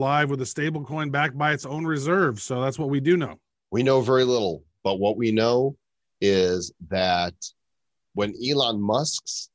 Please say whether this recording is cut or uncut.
uncut